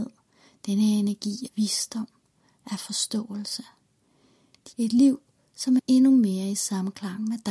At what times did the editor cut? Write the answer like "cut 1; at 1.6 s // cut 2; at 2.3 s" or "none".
cut 1; at 1.5 s // cut 2; at 4.7 s // cut 3; at 5.8 s

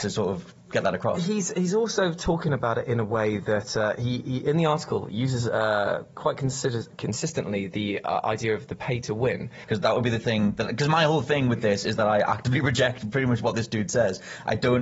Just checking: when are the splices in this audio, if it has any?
cut 1; at 9.6 s

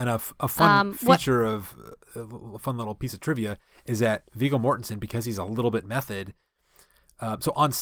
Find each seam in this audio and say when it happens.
none

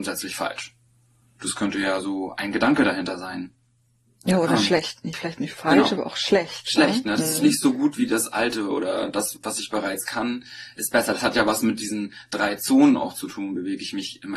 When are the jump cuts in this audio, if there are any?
cut 1; at 9.3 s

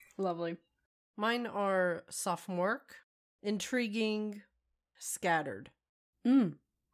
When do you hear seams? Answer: none

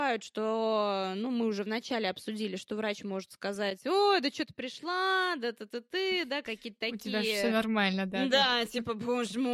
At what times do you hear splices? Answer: none

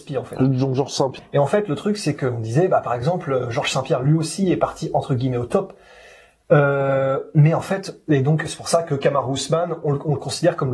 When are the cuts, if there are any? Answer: cut 1; at 1.2 s

